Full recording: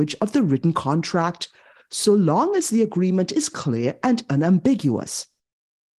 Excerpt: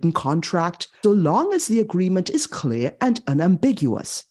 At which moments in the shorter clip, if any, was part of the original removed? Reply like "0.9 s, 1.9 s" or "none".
1.0 s